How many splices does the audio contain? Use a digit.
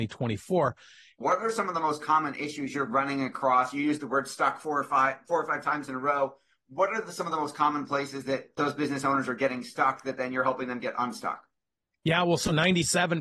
1